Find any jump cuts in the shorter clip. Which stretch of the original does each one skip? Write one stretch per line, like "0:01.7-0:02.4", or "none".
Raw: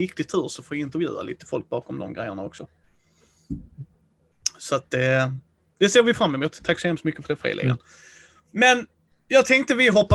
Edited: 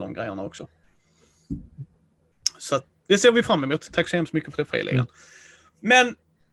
0:04.9-0:05.6